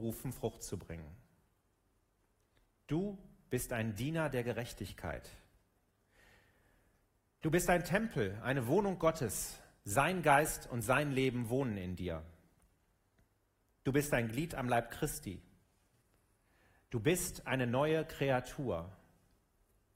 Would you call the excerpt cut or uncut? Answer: uncut